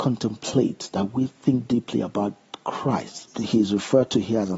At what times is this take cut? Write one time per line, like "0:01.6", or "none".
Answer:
0:03.3